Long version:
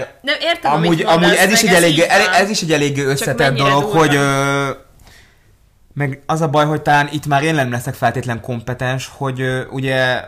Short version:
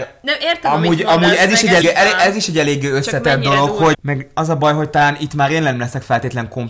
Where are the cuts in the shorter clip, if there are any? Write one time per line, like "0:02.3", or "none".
0:01.8
0:03.9

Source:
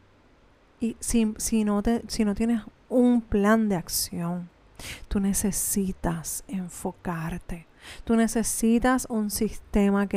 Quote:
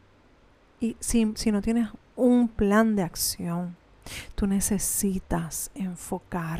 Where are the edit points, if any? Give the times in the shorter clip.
0:01.3

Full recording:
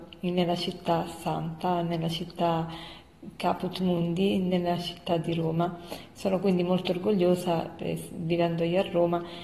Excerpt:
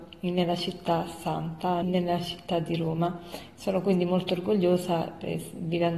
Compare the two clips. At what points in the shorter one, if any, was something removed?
0:01.8

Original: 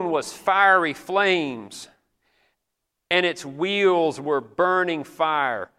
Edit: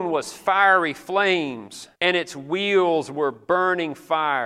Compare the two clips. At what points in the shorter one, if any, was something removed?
0:02.0

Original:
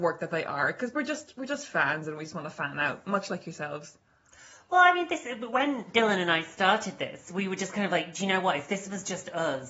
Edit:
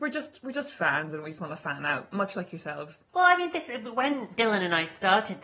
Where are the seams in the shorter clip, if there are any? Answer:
0:03.1

